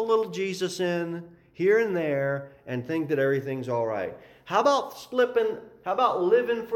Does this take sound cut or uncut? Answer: uncut